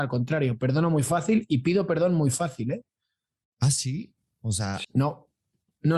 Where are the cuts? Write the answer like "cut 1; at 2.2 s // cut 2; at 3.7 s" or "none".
cut 1; at 4.8 s